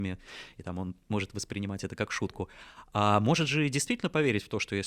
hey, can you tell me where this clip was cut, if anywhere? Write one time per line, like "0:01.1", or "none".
none